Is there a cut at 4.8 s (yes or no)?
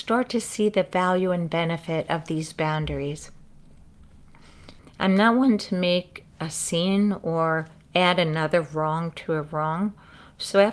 yes